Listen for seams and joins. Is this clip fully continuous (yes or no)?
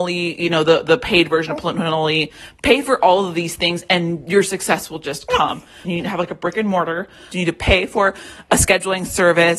no